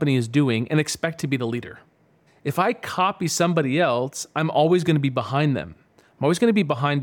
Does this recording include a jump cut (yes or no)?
yes